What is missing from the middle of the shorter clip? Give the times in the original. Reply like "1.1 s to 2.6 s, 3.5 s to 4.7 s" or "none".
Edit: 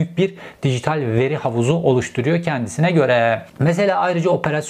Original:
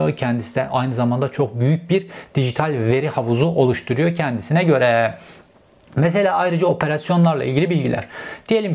5.2 s to 5.9 s